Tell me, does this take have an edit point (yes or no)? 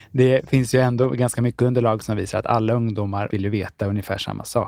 yes